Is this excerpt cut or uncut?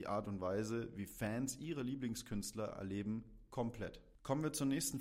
uncut